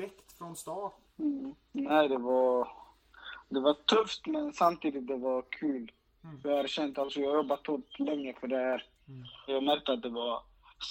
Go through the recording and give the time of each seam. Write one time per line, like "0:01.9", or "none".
0:01.0
0:09.5